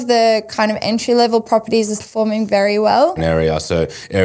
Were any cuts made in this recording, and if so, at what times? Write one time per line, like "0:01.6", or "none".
0:02.0
0:03.2